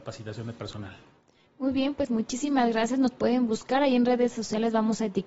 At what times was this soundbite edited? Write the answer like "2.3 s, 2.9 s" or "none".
none

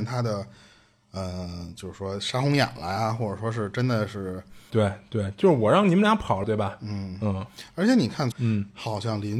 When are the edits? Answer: 4.7 s, 6.4 s, 8.3 s

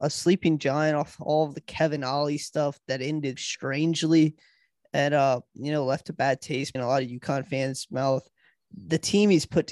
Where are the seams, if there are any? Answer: 3.4 s, 6.8 s

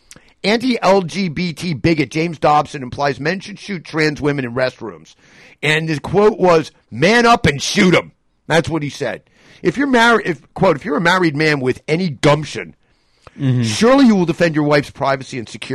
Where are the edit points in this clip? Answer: none

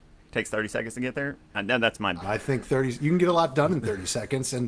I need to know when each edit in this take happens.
2.2 s

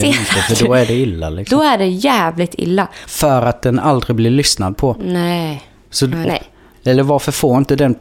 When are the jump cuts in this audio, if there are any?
3.1 s, 6.2 s

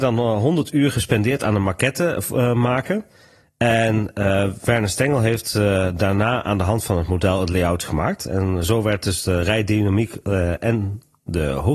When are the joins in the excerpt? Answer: none

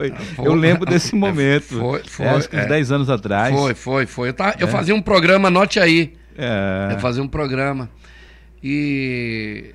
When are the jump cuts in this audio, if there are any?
none

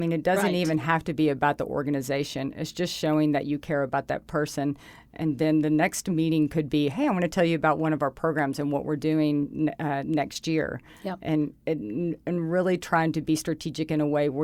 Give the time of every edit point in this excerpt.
none

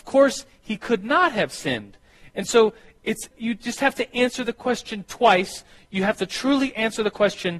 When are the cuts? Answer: 3.3 s

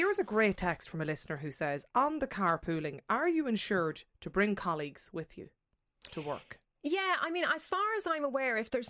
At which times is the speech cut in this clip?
none

